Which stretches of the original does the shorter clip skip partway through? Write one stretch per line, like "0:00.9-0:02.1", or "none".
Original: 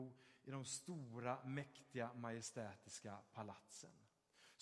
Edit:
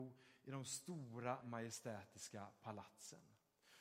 0:01.4-0:02.1